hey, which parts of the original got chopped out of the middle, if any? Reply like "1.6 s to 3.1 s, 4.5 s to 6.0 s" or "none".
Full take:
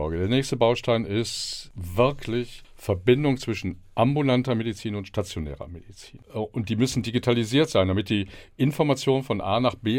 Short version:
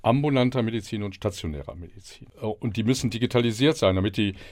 none